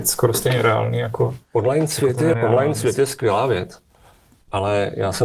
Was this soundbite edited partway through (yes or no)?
yes